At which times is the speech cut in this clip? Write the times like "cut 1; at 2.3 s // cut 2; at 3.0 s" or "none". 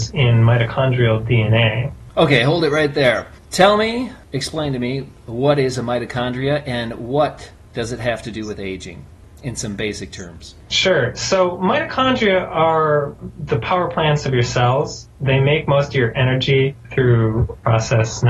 none